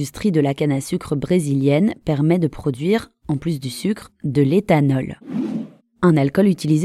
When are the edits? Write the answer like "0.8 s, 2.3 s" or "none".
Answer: none